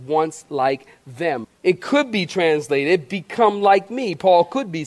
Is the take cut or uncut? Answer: cut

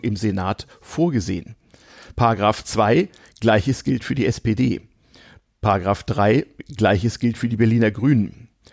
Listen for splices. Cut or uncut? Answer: uncut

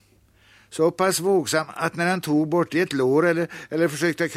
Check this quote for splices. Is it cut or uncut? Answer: uncut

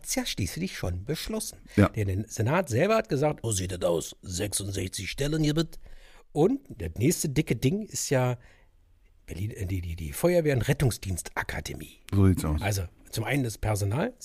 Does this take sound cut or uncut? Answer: cut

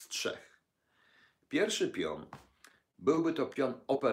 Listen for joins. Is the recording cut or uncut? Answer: uncut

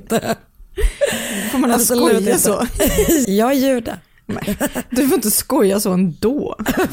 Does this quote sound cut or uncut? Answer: cut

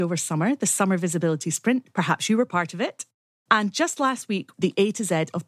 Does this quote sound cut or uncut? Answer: cut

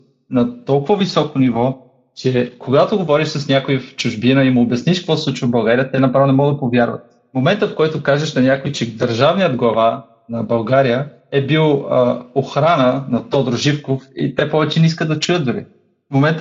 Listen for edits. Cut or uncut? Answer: uncut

